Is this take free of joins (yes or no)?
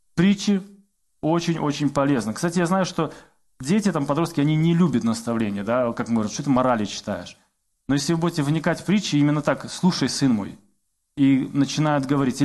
yes